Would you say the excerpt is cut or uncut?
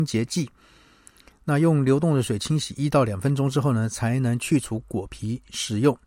uncut